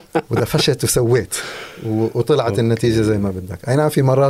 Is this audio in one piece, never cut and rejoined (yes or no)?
yes